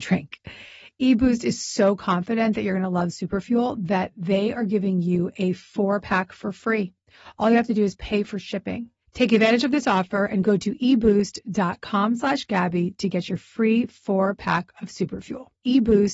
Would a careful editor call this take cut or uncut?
uncut